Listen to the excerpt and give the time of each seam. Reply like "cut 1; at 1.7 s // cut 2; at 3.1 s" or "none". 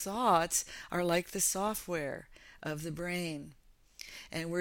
none

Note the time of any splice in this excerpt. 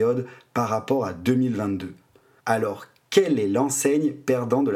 cut 1; at 2.4 s

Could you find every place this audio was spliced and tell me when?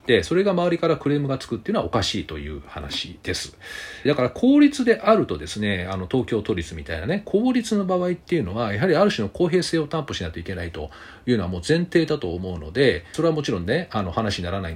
cut 1; at 4.1 s // cut 2; at 13.1 s

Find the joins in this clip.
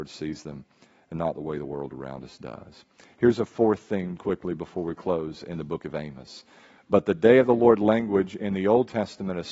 cut 1; at 4.2 s // cut 2; at 6.8 s

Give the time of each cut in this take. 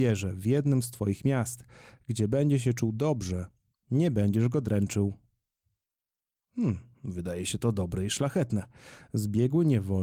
none

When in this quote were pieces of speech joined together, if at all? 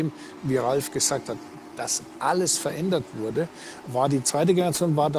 none

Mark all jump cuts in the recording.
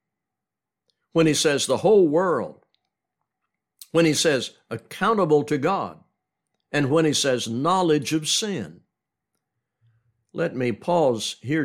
none

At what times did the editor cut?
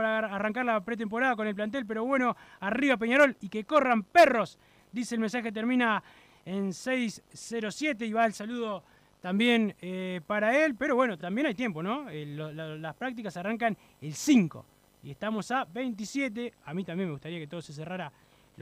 none

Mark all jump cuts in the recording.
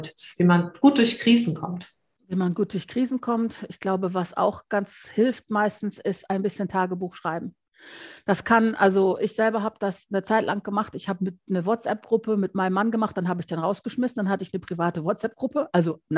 none

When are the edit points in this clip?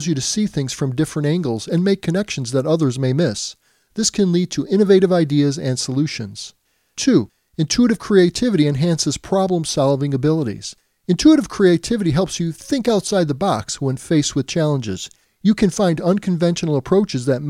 none

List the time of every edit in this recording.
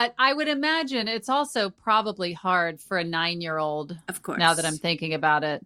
none

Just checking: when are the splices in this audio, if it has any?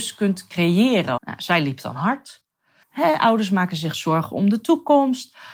cut 1; at 1.2 s // cut 2; at 2.8 s

